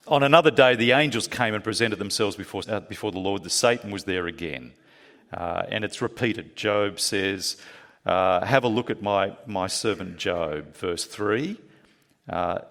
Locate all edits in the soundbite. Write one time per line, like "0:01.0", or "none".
0:02.6